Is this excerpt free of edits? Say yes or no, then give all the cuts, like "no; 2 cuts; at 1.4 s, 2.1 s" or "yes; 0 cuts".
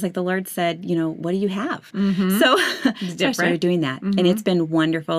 no; 1 cut; at 1.9 s